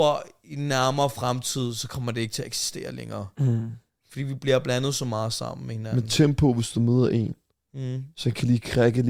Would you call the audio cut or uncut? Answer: uncut